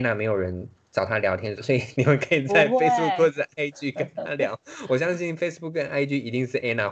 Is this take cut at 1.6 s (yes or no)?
yes